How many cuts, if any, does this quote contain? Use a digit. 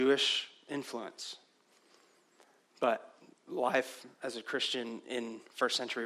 1